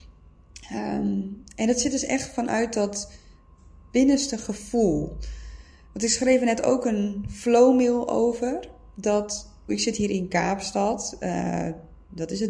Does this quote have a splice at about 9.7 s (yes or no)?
yes